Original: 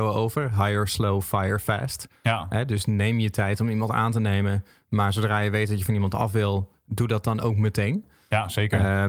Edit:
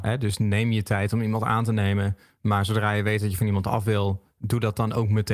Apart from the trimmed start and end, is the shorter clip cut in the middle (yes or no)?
no